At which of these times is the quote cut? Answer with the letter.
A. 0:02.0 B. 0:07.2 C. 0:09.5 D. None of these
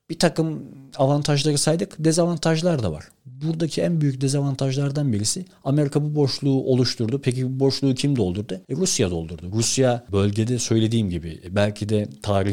D